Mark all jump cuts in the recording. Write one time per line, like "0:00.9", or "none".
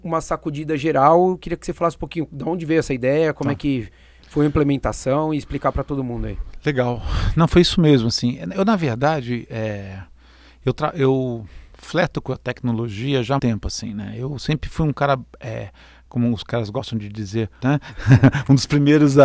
0:13.4
0:17.6